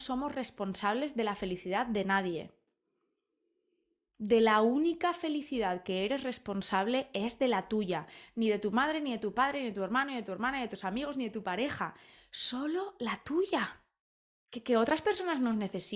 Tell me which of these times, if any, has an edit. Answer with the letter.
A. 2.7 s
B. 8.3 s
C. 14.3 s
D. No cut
C